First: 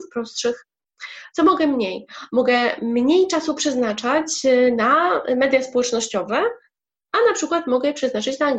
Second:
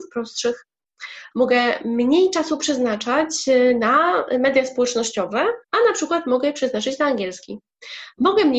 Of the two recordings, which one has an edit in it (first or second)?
second